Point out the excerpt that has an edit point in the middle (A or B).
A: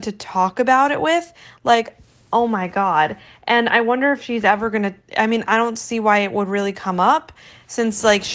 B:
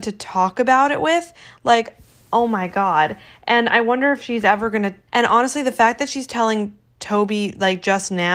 B